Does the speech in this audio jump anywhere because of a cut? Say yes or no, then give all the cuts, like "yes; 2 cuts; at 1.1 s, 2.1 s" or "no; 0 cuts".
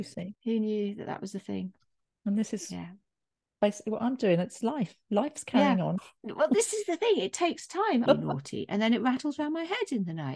yes; 2 cuts; at 6.0 s, 8.1 s